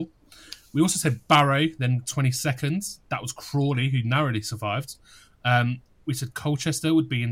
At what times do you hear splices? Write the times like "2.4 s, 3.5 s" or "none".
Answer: none